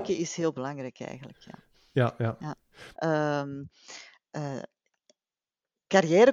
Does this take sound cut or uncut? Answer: cut